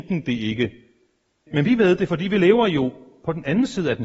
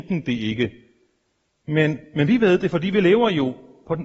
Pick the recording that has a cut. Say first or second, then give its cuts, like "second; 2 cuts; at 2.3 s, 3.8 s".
first; 1 cut; at 1.5 s